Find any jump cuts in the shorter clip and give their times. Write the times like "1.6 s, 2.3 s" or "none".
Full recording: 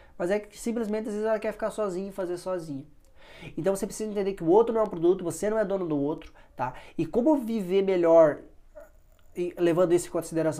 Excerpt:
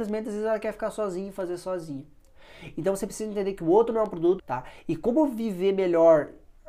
4.4 s